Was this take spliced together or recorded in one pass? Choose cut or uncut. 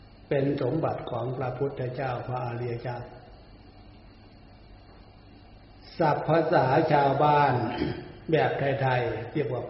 uncut